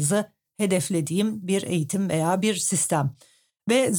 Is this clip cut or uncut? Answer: uncut